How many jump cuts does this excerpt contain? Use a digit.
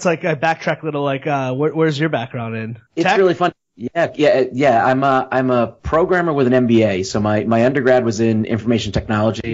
1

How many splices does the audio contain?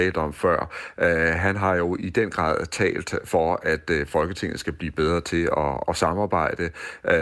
1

